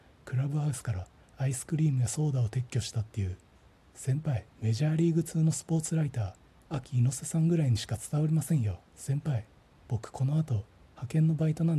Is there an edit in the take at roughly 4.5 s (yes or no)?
yes